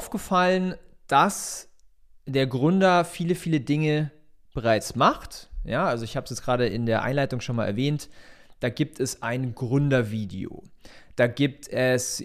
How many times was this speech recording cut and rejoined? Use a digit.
0